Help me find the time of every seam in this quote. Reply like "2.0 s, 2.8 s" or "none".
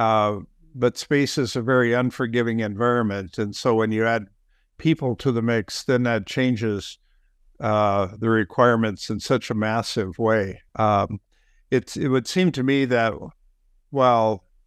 10.7 s

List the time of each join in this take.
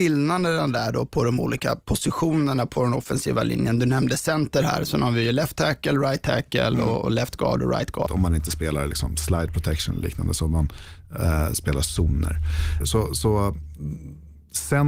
8.1 s, 12.8 s

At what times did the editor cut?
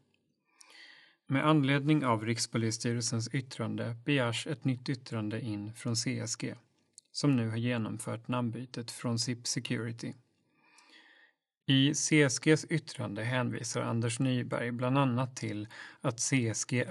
none

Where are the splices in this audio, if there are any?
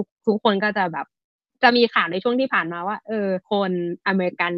3.4 s

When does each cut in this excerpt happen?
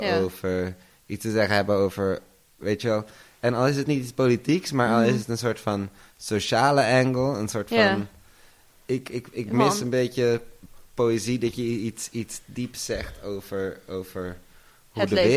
none

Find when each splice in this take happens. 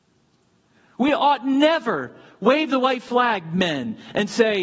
none

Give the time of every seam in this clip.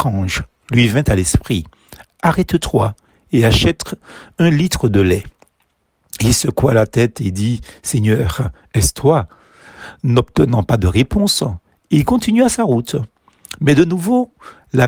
none

